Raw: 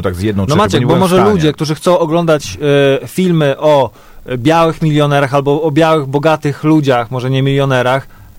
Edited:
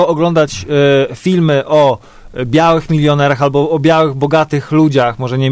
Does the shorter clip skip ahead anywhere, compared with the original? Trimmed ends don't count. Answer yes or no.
no